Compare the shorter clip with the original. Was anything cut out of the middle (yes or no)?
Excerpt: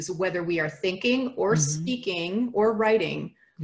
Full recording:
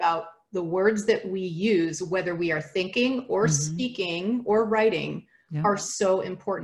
no